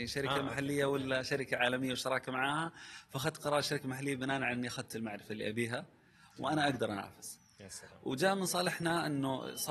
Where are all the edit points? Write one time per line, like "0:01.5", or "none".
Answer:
none